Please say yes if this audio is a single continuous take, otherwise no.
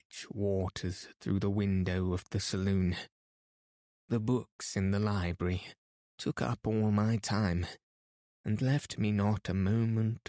no